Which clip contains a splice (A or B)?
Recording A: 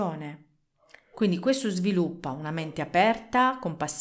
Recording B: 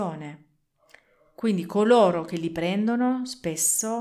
A